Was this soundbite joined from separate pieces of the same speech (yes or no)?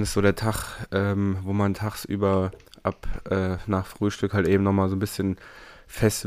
no